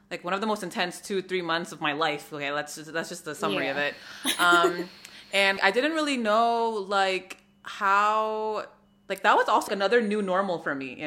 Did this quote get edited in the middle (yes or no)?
yes